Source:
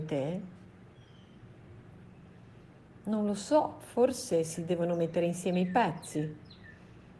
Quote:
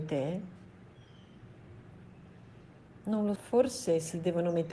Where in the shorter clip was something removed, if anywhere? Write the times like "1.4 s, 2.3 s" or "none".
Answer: 3.4 s